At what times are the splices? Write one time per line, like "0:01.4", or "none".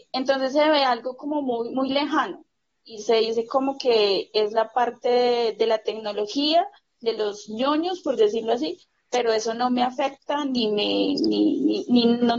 none